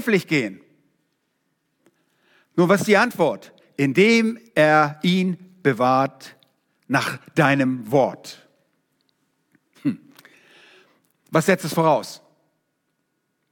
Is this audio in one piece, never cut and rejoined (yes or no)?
yes